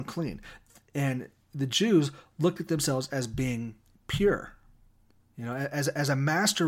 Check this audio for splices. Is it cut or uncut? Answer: uncut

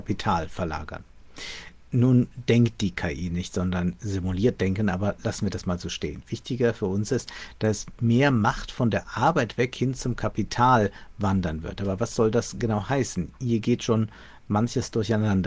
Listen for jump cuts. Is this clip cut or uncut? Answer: uncut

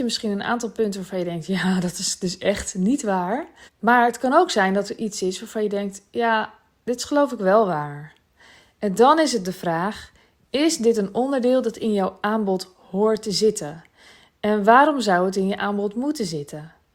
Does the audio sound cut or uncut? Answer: cut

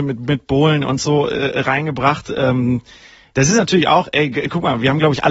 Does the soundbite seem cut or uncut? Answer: uncut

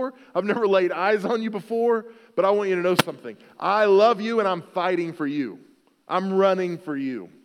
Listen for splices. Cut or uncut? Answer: uncut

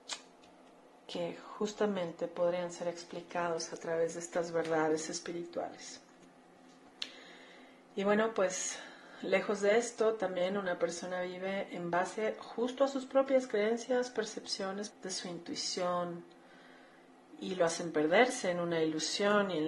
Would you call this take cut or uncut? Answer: cut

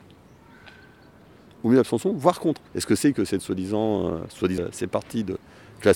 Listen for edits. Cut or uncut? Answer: cut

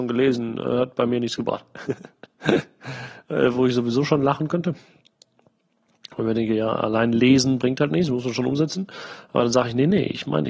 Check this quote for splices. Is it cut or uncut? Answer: uncut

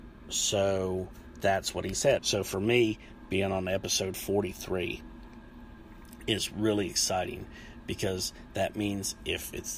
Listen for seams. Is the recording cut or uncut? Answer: cut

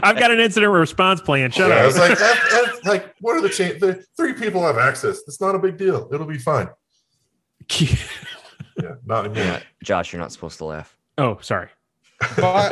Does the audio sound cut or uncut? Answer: uncut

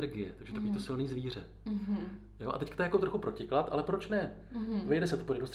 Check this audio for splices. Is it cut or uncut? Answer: uncut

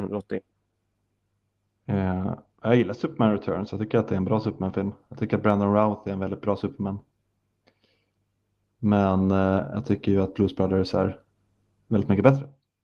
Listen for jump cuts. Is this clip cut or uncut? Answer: uncut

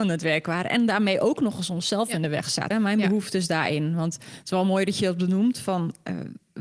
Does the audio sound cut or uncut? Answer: cut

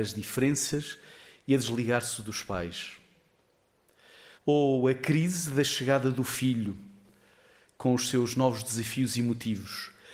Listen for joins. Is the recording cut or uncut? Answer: cut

